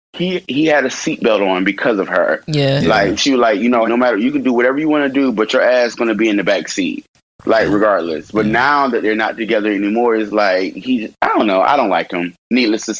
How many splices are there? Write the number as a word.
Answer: one